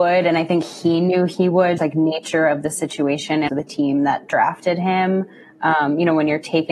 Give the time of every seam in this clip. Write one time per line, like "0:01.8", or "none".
0:01.8
0:03.5